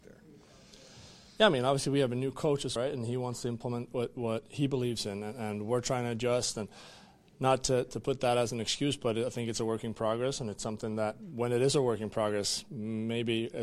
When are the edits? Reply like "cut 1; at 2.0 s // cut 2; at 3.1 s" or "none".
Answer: cut 1; at 2.8 s